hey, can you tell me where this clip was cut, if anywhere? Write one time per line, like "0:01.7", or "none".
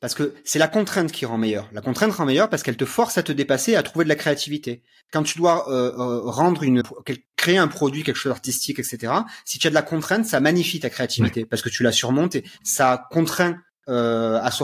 0:06.8